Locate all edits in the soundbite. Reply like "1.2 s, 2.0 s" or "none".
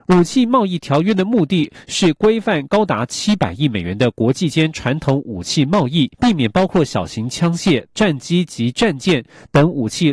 6.1 s, 7.9 s